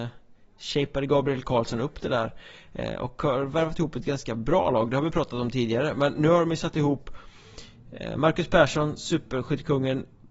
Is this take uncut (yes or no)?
yes